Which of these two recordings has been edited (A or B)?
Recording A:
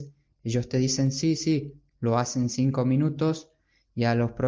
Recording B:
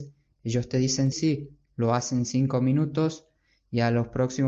B